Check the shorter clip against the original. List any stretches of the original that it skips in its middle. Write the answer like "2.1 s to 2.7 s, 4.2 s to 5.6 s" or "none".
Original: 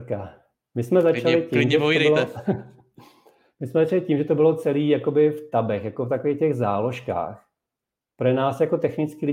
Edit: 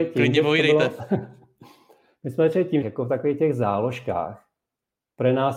4.2 s to 5.8 s